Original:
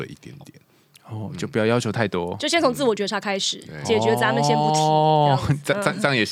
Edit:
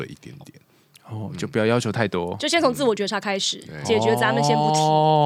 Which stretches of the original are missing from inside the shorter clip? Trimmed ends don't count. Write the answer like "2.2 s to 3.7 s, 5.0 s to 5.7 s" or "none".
none